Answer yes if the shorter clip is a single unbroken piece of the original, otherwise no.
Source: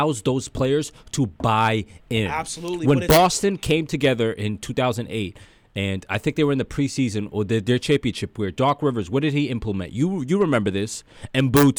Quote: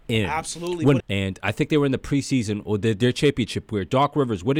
no